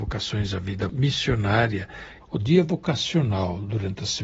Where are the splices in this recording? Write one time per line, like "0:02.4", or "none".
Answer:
0:02.2